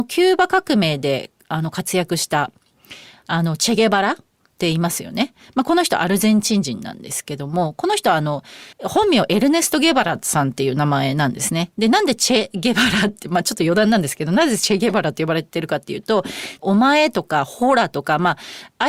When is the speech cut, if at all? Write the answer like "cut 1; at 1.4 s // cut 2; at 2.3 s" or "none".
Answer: cut 1; at 8.7 s // cut 2; at 16.6 s